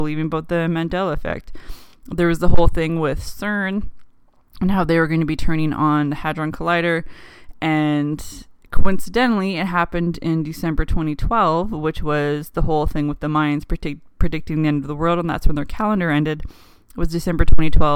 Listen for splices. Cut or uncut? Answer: uncut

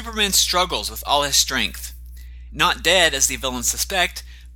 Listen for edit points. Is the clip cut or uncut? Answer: cut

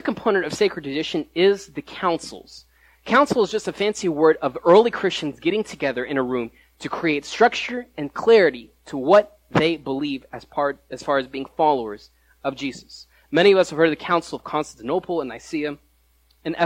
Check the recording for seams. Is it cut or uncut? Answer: uncut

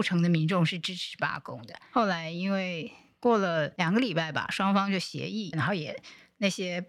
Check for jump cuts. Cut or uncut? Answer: cut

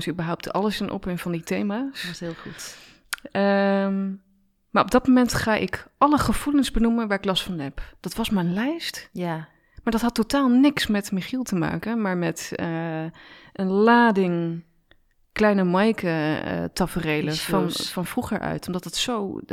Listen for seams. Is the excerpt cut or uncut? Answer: uncut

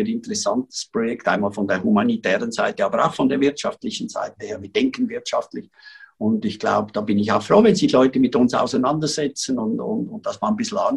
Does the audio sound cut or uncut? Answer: uncut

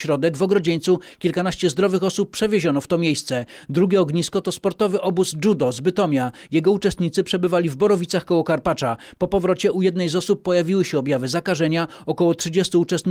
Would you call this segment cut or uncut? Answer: uncut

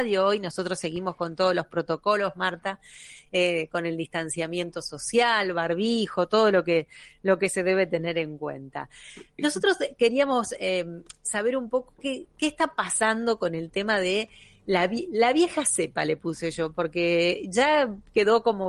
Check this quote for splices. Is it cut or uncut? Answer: uncut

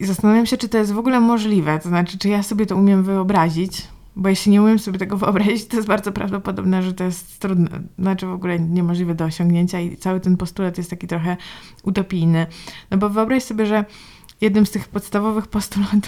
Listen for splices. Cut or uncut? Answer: uncut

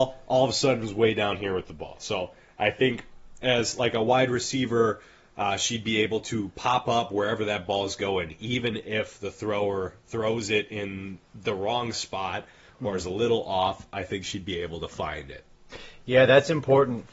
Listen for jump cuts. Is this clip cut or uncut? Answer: uncut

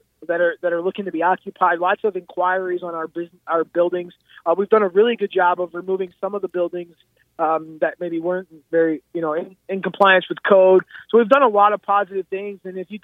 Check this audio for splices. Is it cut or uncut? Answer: uncut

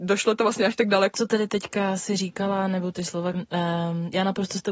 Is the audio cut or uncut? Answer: cut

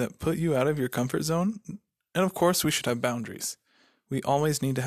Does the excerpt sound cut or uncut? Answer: uncut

